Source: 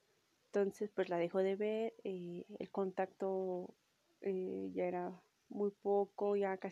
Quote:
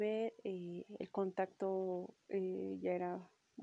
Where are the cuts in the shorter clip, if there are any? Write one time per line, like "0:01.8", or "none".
0:02.2